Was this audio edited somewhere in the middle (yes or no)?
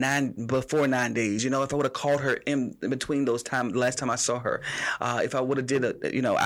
no